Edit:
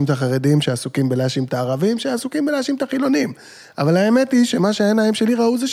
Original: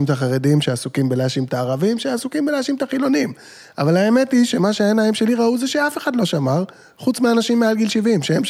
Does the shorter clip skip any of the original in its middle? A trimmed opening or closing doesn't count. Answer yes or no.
no